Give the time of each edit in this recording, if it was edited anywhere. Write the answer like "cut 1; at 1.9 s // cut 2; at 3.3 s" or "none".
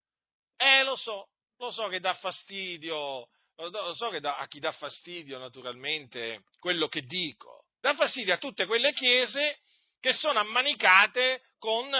cut 1; at 7.8 s